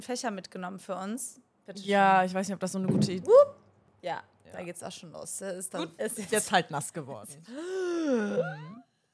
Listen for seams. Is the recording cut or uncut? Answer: cut